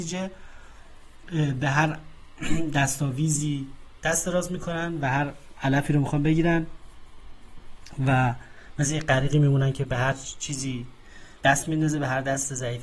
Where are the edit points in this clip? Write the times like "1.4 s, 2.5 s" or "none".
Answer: 3.9 s, 11.3 s